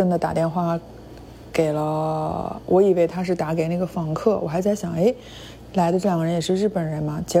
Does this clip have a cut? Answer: no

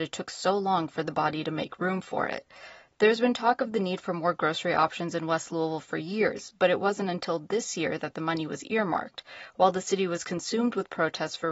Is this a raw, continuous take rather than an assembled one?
yes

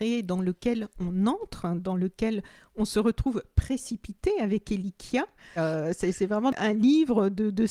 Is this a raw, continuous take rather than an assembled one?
no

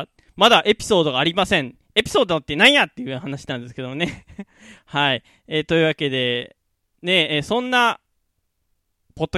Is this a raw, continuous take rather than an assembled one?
yes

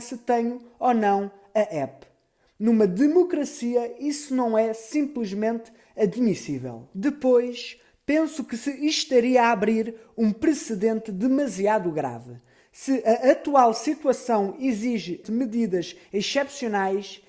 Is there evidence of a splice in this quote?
yes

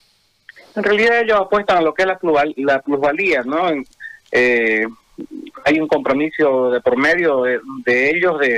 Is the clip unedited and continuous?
yes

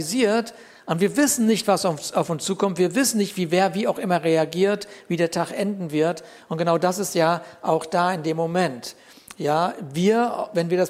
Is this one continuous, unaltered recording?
yes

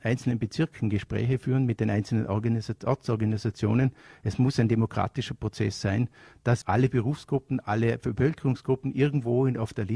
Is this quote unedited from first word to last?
no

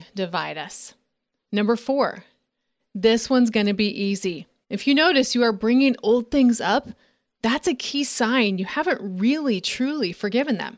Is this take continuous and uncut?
no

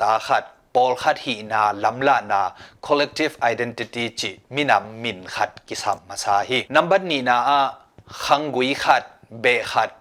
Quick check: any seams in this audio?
yes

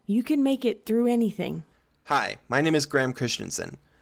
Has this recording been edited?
no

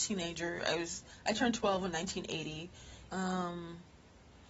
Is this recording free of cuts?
no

